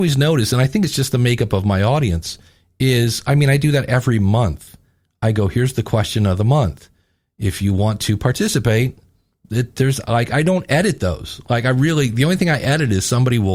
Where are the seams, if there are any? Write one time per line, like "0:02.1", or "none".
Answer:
none